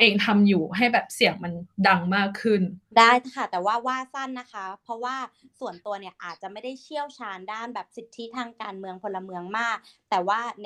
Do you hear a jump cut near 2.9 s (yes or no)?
yes